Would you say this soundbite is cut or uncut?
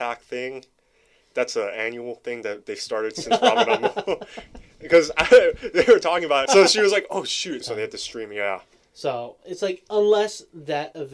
cut